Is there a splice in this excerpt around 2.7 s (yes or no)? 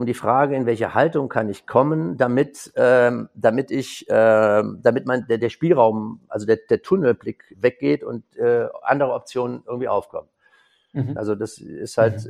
no